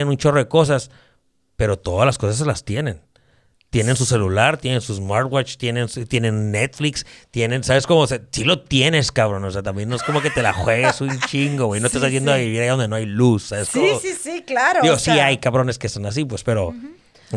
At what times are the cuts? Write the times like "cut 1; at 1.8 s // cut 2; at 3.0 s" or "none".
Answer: cut 1; at 14.2 s